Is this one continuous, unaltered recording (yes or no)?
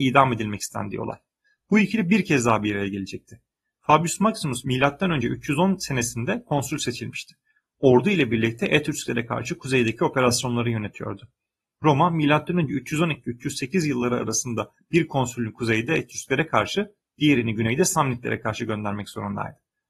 yes